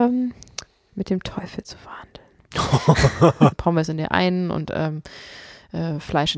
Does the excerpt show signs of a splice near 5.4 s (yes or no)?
no